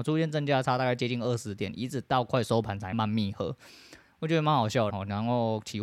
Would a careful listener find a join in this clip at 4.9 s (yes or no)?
yes